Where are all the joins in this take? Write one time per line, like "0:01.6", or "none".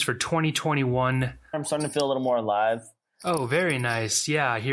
0:01.5
0:03.2